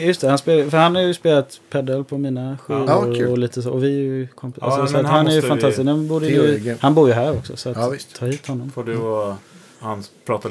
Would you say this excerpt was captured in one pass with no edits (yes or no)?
yes